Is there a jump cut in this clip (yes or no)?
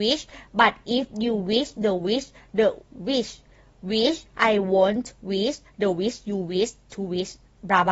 no